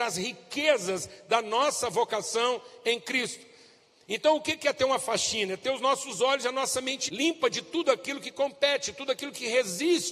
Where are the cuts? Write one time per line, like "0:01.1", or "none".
0:07.1